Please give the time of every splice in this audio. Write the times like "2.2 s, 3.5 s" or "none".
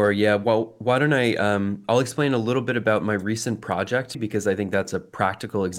4.1 s